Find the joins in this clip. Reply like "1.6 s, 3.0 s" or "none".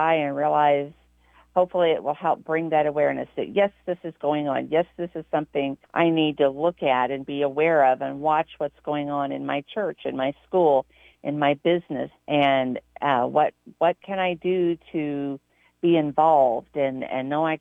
5.8 s, 12.1 s